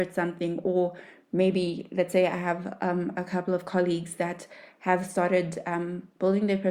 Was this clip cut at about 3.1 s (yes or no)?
no